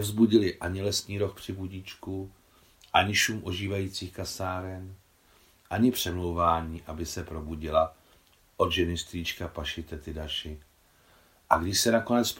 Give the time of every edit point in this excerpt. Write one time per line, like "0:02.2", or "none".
none